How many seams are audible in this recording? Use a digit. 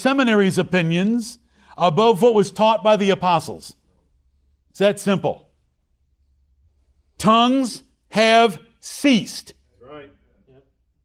1